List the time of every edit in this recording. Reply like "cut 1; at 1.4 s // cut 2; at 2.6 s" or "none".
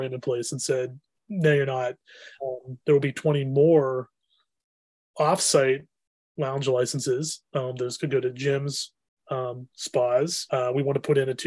cut 1; at 2.4 s // cut 2; at 9.2 s // cut 3; at 10.5 s